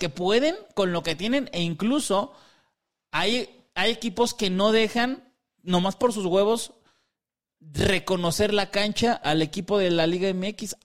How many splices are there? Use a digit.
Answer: 1